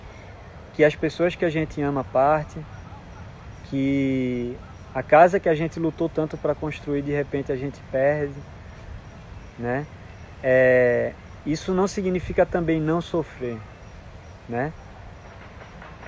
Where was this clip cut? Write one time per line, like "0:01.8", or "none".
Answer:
none